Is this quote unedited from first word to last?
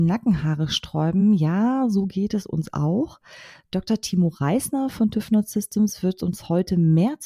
yes; 0 cuts

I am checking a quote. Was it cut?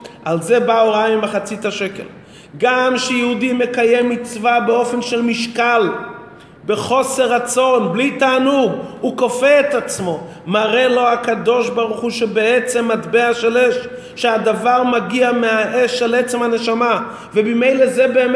no; 0 cuts

